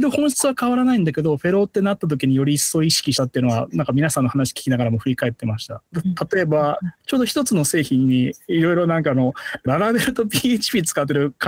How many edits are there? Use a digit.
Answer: 3